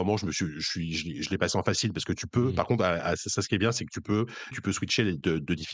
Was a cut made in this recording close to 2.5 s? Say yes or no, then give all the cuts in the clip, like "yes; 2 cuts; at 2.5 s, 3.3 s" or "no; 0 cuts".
no; 1 cut; at 4.5 s